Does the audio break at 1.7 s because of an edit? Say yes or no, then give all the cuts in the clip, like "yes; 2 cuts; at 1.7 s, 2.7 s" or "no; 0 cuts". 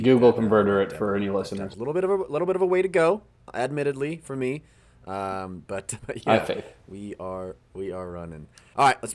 yes; 2 cuts; at 1.7 s, 6.0 s